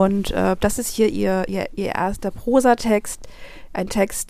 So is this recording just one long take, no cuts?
yes; 0 cuts

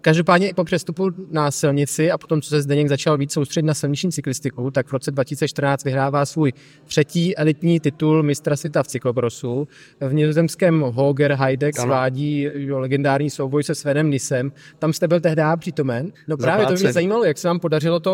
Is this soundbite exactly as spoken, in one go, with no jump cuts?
no; 2 cuts; at 11.7 s, 16.1 s

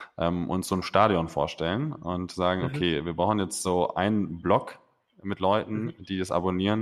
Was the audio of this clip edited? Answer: no; 0 cuts

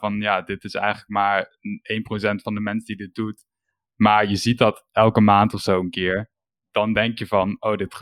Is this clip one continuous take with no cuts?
yes; 0 cuts

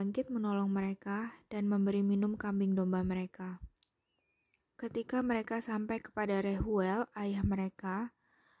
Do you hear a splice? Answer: no; 0 cuts

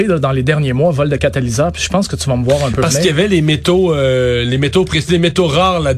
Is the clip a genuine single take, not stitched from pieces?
yes; 0 cuts

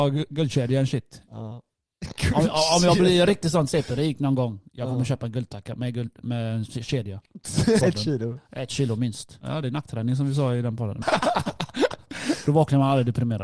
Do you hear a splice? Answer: yes; 3 cuts; at 7.8 s, 9.4 s, 11.0 s

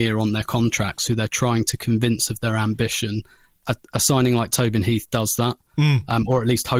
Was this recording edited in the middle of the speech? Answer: no; 0 cuts

